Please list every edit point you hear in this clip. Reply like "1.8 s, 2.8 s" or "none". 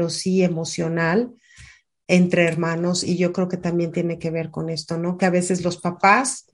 none